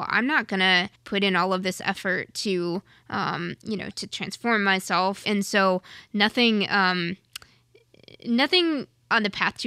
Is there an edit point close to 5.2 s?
yes; 2 cuts; at 0.9 s, 5.2 s

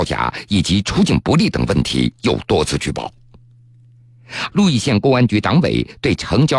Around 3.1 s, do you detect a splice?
no; 1 cut; at 4.5 s

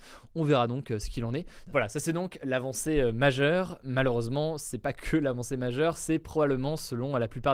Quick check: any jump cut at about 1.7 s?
yes; 1 cut; at 1.7 s

